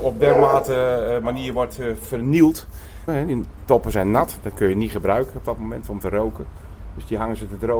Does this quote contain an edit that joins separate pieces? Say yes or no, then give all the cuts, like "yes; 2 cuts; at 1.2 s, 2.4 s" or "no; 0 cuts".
yes; 1 cut; at 3.1 s